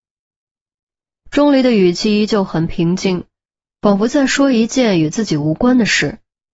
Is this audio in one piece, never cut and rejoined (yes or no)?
yes